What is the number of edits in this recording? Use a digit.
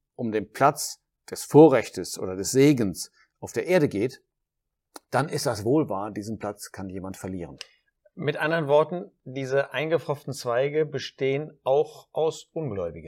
0